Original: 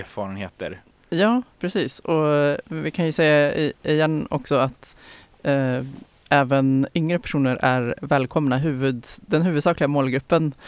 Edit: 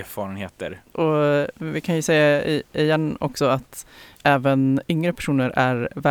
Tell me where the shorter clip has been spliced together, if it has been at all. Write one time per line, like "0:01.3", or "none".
0:00.9
0:04.2